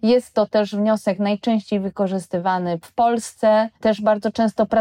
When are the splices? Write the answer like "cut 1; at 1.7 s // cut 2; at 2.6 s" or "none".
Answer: cut 1; at 3.8 s